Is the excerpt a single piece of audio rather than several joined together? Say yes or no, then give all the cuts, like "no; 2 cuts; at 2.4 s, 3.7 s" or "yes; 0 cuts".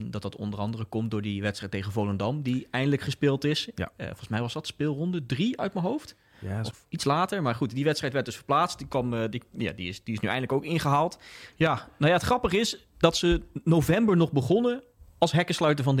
no; 2 cuts; at 6.7 s, 11.5 s